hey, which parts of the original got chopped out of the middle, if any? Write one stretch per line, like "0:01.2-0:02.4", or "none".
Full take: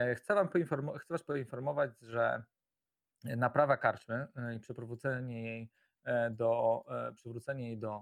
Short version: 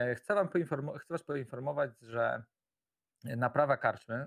none